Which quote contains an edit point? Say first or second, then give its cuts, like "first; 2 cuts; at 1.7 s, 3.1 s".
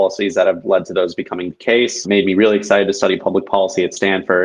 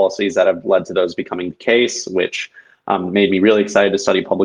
first; 1 cut; at 2.0 s